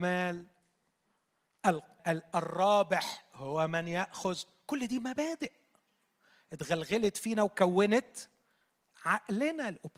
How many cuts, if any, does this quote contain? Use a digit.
1